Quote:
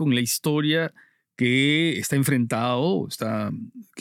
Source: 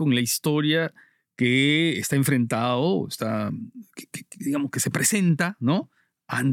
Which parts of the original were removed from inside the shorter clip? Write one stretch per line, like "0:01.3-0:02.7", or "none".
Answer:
none

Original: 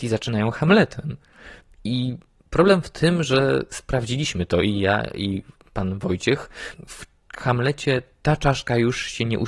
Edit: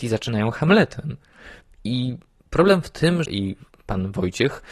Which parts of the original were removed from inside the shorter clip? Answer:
0:03.3-0:05.1

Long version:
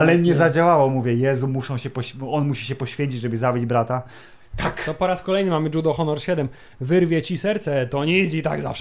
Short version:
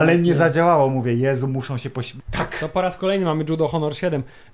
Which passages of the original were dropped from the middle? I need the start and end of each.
0:02.2-0:04.5

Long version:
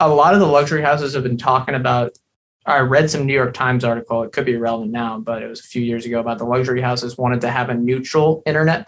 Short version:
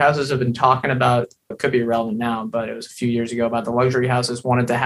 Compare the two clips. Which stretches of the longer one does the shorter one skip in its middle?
0:02.3-0:04.2

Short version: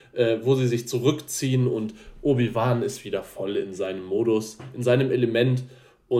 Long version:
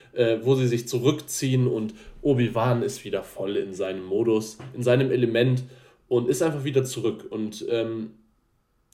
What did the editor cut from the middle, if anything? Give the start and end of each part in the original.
none

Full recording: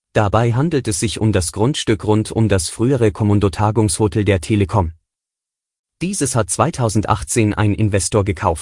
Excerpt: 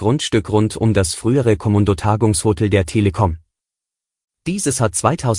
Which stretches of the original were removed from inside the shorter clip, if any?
none

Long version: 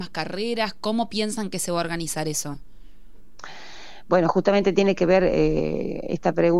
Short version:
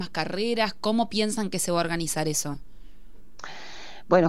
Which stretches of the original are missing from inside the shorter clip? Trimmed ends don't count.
none

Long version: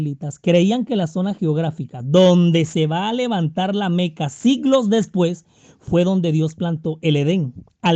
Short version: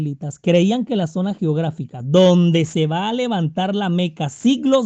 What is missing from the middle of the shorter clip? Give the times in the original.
none

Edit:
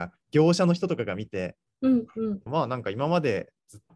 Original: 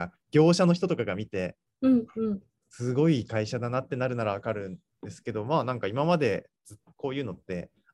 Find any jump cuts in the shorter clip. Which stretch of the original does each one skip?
0:02.5-0:05.4

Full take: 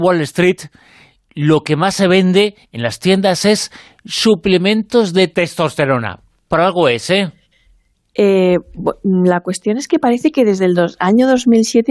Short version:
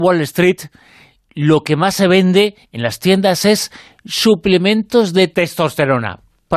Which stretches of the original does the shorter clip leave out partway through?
none

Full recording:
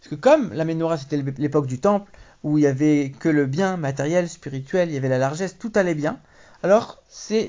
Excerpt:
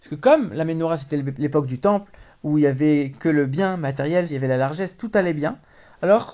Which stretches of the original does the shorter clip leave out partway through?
0:04.3-0:04.9

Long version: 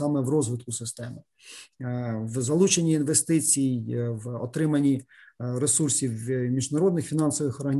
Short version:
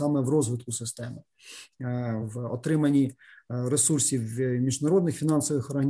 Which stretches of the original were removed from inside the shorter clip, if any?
0:02.2-0:04.1

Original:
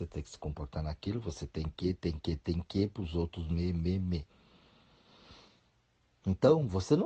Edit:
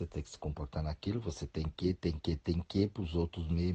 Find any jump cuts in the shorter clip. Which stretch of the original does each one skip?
none

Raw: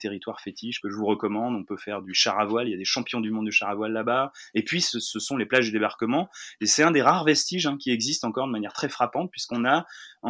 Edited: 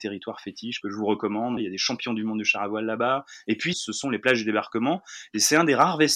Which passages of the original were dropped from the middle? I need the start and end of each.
0:01.6-0:02.6
0:04.8-0:05.0

